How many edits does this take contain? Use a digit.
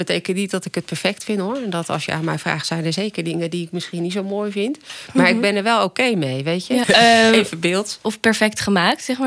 2